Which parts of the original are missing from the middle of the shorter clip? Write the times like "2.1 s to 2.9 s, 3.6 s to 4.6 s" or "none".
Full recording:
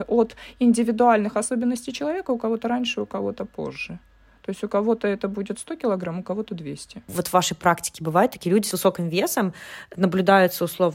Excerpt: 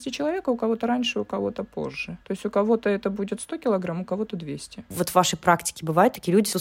4.0 s to 4.4 s